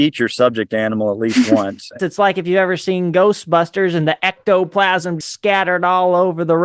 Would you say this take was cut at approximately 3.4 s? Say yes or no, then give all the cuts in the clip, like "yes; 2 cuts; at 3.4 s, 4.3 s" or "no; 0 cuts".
no; 2 cuts; at 2.0 s, 5.2 s